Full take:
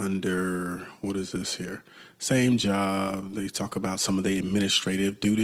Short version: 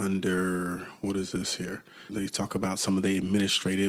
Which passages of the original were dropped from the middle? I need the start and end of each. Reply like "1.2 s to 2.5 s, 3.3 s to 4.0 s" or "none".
2.1 s to 3.3 s